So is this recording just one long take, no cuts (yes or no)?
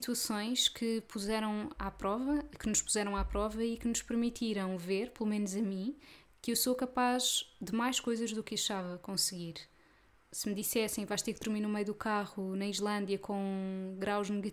no